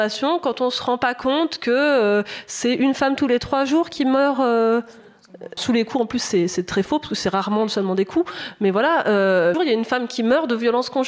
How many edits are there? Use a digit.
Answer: 2